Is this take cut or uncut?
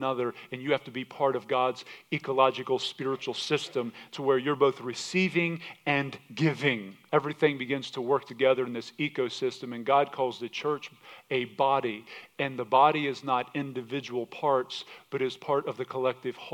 cut